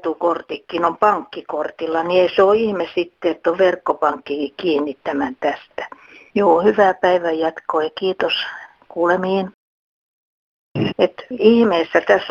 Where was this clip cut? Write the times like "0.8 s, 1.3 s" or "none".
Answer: 6.3 s, 10.9 s